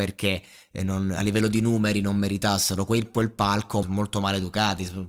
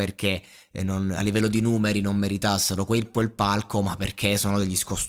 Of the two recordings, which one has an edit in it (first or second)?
first